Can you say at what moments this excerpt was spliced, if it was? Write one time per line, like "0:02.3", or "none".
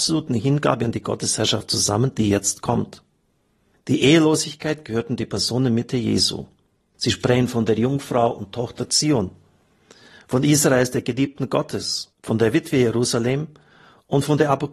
0:06.9
0:12.1